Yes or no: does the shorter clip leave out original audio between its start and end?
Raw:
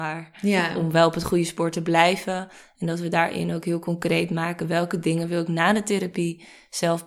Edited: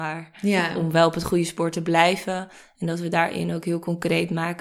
no